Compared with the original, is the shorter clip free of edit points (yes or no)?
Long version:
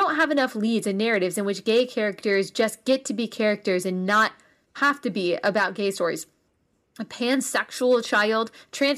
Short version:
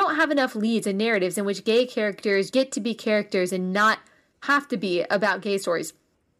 no